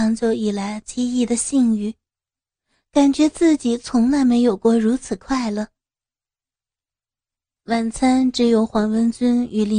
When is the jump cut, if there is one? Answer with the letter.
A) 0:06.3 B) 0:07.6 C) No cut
B